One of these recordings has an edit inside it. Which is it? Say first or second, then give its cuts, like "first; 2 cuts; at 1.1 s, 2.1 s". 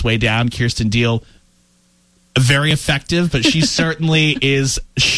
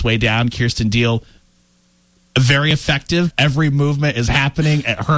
second; 1 cut; at 3.3 s